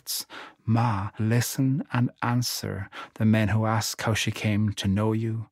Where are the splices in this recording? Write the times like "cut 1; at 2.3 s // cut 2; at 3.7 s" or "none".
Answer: cut 1; at 1.2 s